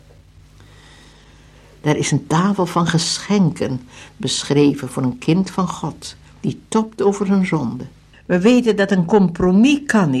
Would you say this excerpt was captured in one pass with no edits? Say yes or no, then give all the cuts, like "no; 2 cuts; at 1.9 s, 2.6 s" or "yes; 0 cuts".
no; 2 cuts; at 1.8 s, 8.1 s